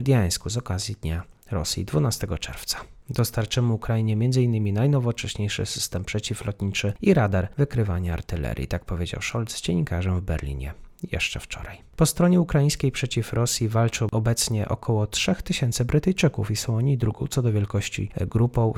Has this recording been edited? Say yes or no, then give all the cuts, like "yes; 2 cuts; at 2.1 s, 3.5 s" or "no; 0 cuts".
yes; 1 cut; at 3.0 s